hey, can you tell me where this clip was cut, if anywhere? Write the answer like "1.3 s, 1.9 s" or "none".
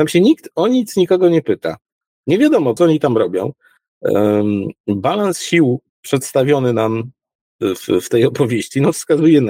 2.8 s, 5.9 s